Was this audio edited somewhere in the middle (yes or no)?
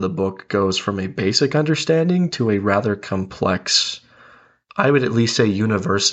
no